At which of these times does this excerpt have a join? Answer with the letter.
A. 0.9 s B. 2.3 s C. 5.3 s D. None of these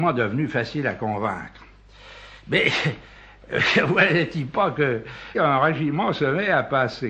C